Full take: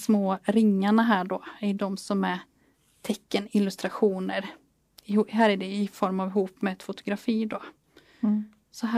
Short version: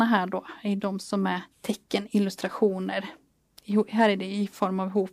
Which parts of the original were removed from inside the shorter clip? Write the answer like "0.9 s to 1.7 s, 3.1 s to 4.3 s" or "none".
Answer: 2.5 s to 2.9 s